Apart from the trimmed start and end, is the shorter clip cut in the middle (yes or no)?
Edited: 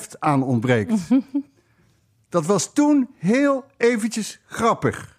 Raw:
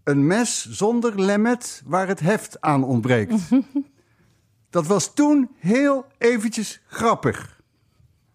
no